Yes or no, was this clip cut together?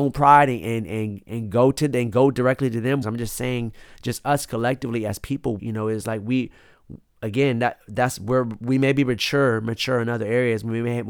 yes